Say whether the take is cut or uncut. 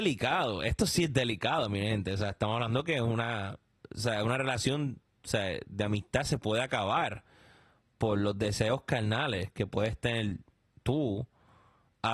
uncut